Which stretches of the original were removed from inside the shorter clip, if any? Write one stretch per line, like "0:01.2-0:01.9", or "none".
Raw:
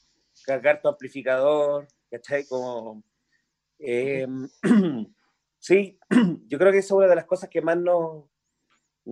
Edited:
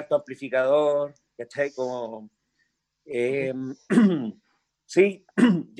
none